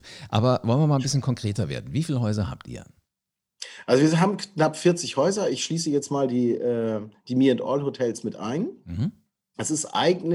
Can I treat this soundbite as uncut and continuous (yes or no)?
yes